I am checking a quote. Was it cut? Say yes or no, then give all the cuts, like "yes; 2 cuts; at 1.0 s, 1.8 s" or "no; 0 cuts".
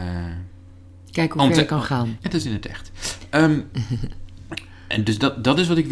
yes; 1 cut; at 2.2 s